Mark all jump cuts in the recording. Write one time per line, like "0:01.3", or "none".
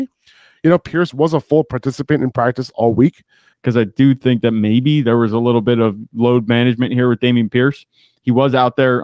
0:03.5